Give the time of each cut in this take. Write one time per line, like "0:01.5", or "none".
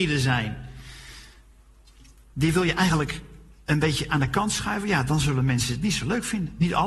none

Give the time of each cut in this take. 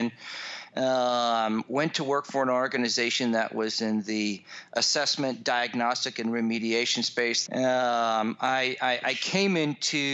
0:07.5

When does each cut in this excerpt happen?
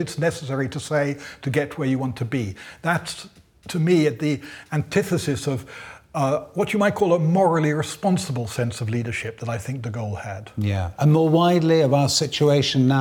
none

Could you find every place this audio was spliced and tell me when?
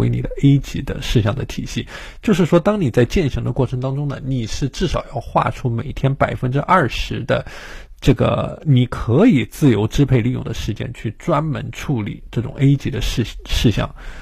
none

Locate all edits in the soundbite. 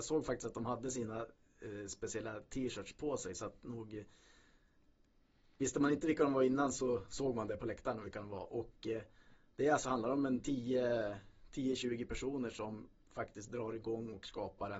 none

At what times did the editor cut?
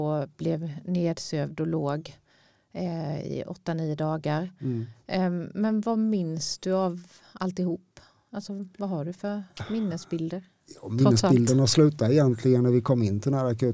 none

